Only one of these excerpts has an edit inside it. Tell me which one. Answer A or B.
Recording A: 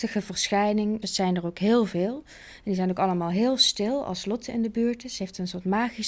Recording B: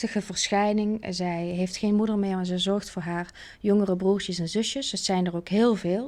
A